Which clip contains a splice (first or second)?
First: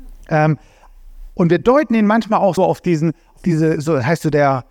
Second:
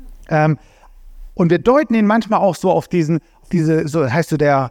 first